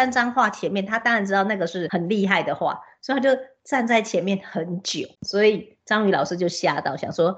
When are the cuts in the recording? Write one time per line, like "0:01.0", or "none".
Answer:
0:05.1